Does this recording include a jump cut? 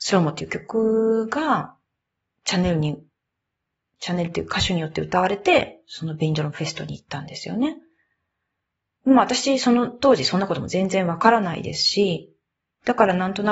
no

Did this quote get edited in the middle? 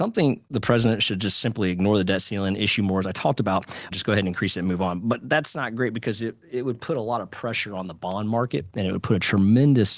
yes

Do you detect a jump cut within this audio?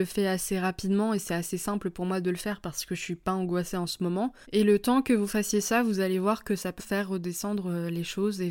yes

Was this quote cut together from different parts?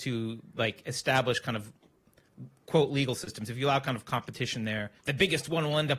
yes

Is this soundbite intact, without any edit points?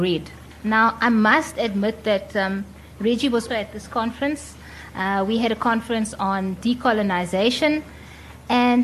no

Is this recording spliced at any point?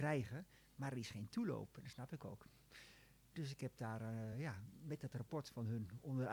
no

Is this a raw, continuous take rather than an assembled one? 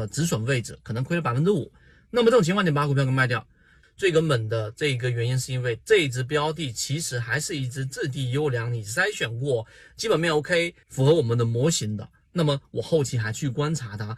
no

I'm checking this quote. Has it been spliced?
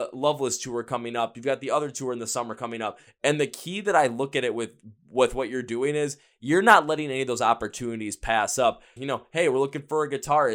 yes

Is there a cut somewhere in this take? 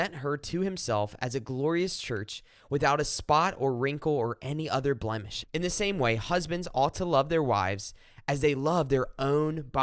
yes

